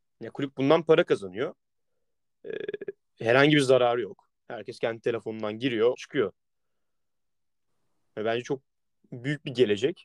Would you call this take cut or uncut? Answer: cut